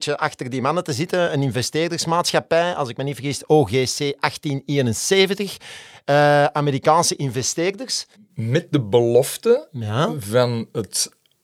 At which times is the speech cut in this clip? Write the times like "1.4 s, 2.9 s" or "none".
8.1 s